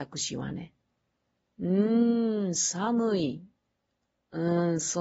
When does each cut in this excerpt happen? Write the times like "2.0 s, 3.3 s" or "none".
none